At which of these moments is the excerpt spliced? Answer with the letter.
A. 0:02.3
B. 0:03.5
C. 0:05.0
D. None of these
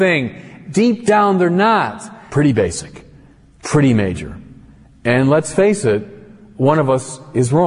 A